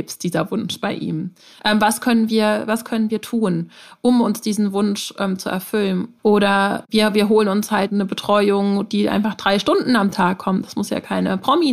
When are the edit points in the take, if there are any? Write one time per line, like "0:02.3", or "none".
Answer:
0:01.6
0:06.2